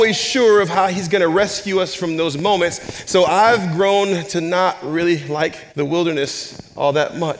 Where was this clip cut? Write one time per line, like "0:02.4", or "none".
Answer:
0:05.7